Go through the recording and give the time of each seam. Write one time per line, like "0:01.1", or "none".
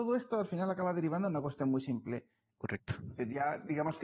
0:02.5